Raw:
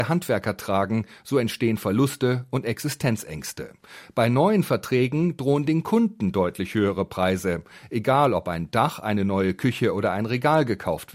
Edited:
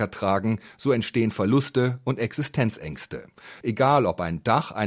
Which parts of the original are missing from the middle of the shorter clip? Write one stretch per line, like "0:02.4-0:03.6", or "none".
0:04.1-0:07.9